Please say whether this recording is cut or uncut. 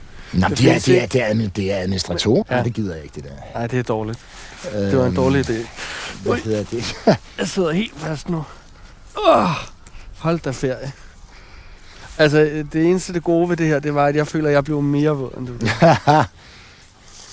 cut